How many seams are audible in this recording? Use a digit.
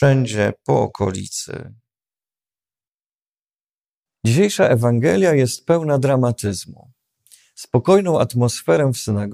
0